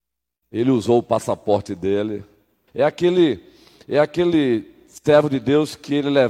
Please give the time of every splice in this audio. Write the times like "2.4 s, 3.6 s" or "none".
2.7 s